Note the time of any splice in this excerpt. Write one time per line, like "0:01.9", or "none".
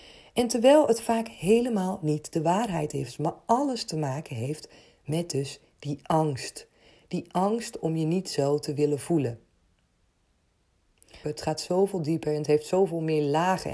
0:11.2